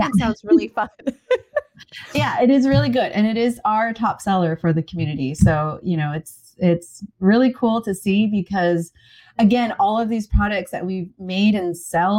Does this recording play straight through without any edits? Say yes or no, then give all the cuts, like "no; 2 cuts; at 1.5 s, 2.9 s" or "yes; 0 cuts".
yes; 0 cuts